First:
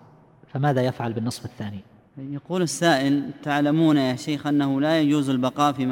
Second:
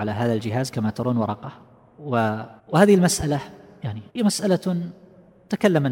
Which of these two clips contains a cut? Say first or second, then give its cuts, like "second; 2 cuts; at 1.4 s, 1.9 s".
second; 2 cuts; at 2.6 s, 4.1 s